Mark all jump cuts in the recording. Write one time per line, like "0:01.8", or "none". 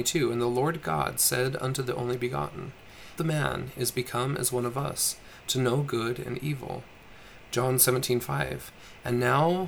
0:03.2